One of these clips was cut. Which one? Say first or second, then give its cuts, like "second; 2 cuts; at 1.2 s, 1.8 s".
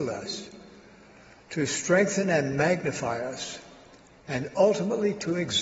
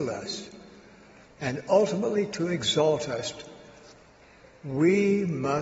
second; 1 cut; at 1.2 s